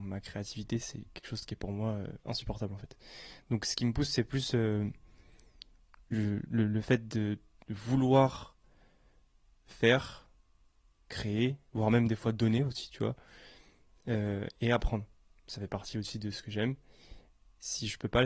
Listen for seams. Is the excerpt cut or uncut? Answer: uncut